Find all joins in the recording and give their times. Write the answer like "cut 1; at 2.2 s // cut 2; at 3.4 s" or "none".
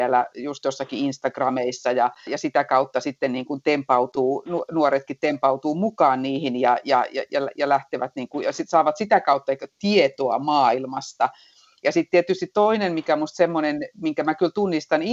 cut 1; at 2.3 s